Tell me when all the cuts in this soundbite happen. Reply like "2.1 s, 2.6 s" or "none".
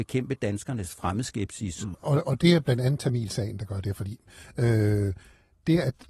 1.9 s